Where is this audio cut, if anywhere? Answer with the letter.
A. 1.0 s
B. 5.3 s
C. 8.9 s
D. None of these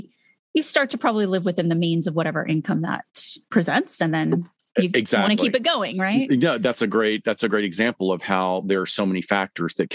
D